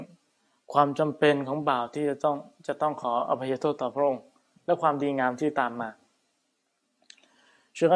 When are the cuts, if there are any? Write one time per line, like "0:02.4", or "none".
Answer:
none